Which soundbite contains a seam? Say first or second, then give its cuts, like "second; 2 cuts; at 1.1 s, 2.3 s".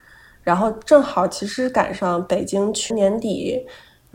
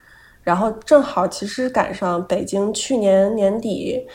first; 1 cut; at 2.9 s